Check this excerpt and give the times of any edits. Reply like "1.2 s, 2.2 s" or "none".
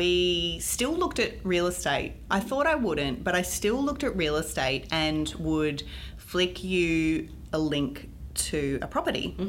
none